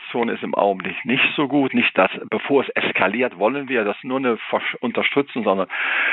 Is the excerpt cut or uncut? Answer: uncut